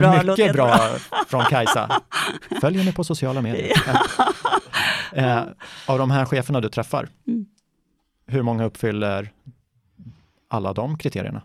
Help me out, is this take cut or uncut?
uncut